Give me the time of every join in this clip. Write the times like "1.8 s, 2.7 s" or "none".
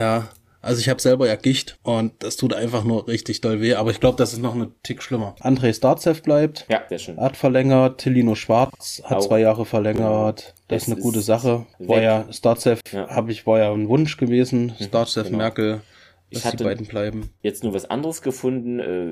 1.8 s